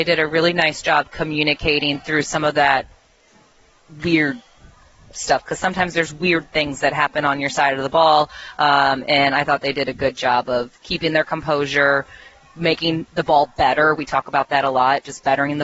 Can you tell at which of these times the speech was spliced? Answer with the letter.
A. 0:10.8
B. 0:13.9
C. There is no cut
A